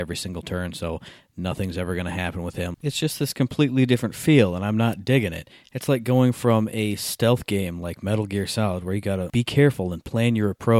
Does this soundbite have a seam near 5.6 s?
no; 1 cut; at 2.7 s

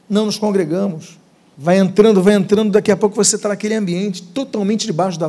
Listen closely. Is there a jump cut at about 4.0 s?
no; 1 cut; at 1.5 s

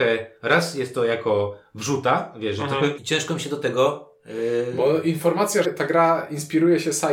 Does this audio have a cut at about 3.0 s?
yes; 2 cuts; at 3.0 s, 5.6 s

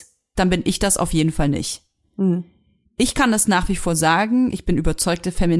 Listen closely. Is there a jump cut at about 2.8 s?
no; 0 cuts

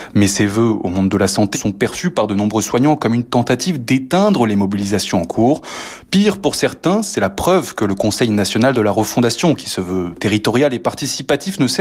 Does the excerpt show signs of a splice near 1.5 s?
yes; 1 cut; at 1.5 s

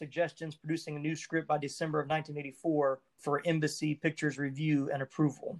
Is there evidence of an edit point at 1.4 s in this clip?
no; 1 cut; at 3.1 s

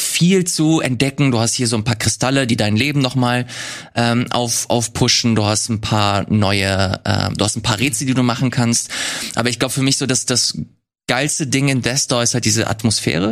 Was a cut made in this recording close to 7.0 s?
no; 0 cuts

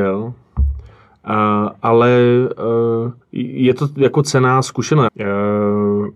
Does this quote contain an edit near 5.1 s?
yes; 2 cuts; at 3.2 s, 5.1 s

